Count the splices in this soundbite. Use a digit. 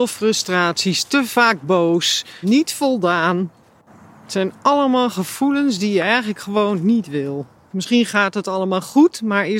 2